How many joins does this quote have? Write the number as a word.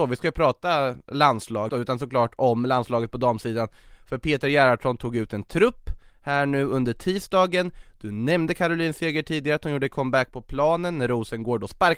one